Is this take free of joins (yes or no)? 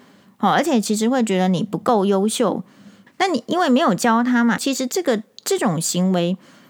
no